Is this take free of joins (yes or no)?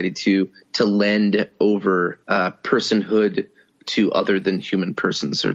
no